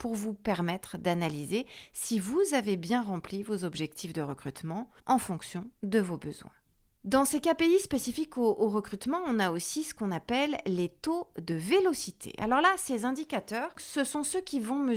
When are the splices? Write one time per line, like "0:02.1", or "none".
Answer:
0:05.0